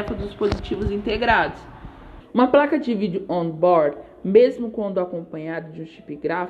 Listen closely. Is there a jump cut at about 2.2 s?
yes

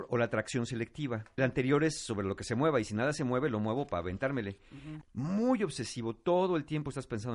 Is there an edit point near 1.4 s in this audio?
yes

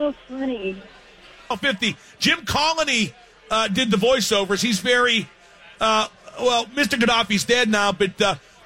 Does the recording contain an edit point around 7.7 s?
no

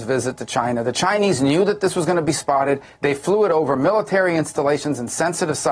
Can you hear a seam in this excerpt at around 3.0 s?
yes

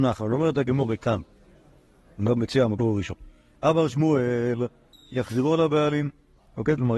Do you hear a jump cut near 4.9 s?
yes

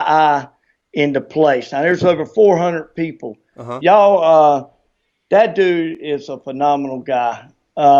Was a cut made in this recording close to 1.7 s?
no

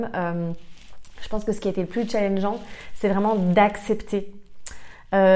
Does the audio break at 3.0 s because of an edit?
no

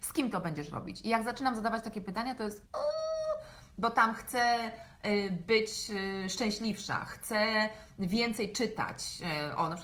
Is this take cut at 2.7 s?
yes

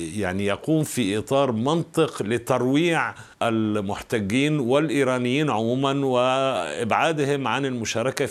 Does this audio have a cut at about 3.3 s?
yes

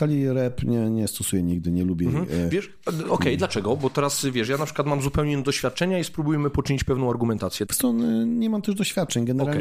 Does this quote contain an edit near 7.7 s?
yes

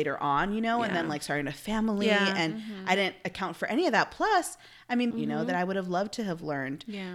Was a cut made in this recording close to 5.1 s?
yes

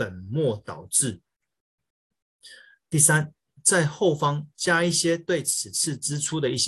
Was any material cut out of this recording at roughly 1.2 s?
no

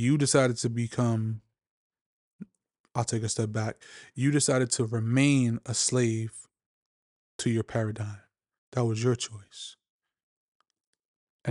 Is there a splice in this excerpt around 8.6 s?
yes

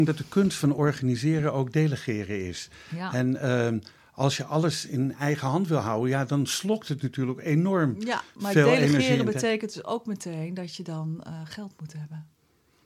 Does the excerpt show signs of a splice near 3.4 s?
no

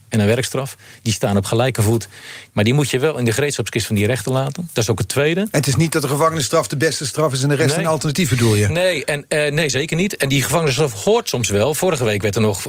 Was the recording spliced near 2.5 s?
yes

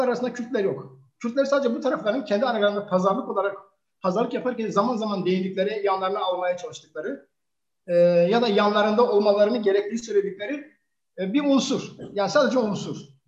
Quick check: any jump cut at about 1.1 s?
no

